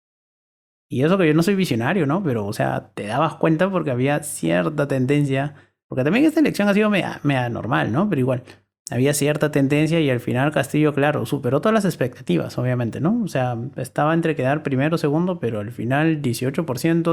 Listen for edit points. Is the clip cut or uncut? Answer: uncut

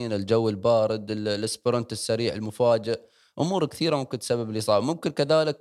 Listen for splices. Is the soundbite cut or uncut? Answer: uncut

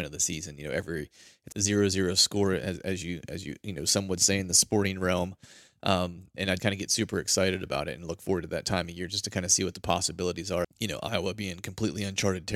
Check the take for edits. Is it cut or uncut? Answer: cut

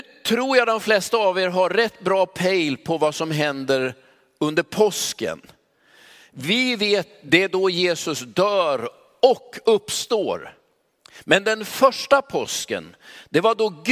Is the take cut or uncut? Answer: uncut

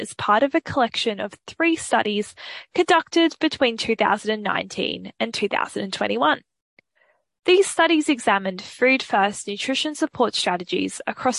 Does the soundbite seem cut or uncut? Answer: uncut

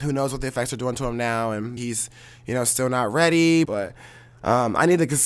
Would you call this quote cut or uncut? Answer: cut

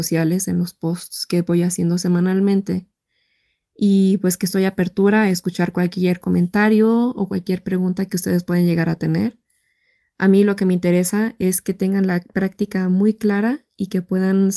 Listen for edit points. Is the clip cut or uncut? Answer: uncut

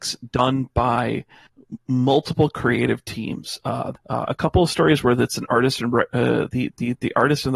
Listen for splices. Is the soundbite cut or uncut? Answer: cut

